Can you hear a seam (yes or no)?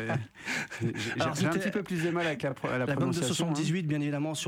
no